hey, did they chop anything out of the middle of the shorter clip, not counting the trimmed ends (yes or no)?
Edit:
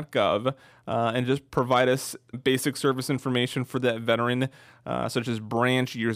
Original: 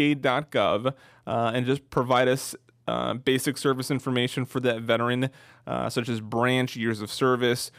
yes